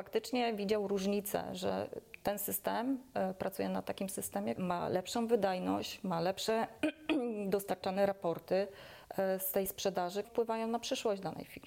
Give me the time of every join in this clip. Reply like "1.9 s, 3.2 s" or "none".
4.6 s, 10.2 s

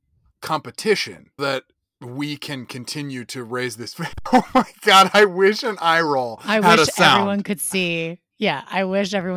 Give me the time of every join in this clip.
1.4 s

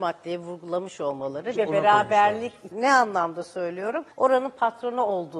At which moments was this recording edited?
1.6 s, 2.7 s, 4.1 s

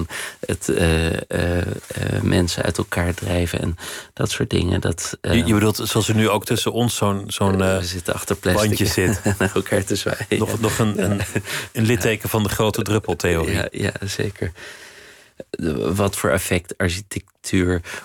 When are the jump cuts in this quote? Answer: 15.4 s

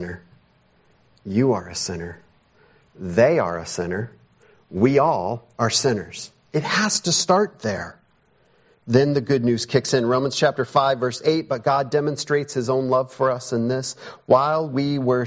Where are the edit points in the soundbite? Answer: none

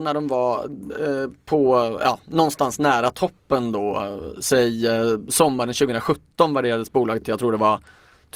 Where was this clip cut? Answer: none

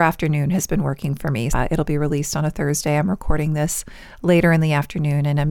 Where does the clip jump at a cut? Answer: 1.5 s

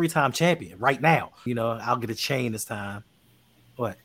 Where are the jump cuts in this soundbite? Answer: 1.5 s

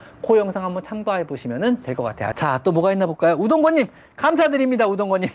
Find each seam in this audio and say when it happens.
2.3 s

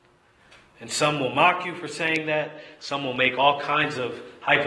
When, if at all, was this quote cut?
none

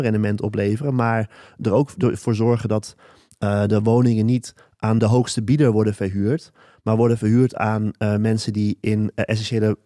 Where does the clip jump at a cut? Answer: 5.0 s

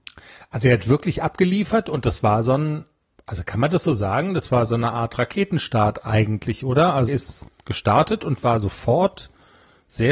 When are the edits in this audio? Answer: 7.1 s

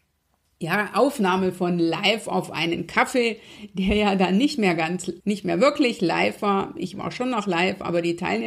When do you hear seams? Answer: 5.2 s

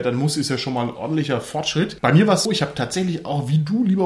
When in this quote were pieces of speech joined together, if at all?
2.4 s

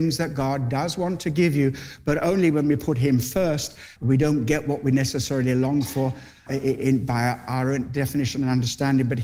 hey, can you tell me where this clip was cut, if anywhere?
4.0 s, 6.5 s

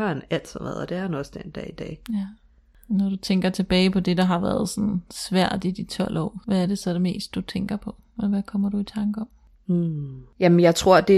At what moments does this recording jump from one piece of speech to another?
none

